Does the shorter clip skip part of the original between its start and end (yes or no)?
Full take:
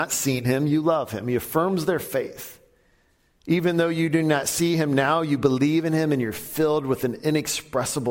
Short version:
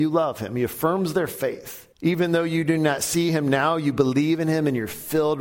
yes